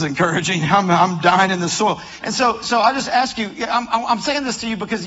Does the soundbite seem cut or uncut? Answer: cut